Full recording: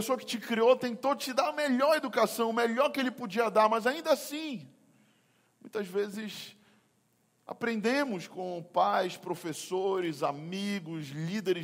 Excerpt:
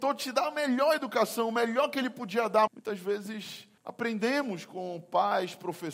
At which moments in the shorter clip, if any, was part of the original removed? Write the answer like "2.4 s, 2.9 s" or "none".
2.7 s, 3.8 s